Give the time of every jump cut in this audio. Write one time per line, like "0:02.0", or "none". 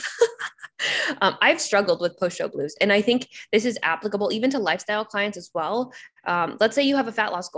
none